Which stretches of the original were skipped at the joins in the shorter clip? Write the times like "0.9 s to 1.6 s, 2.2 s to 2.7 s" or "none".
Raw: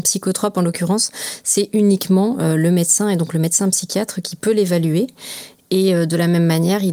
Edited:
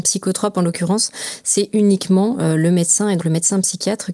3.2 s to 3.3 s